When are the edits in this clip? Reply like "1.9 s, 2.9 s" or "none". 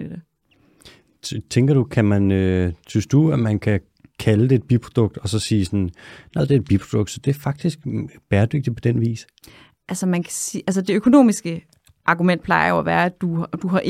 6.4 s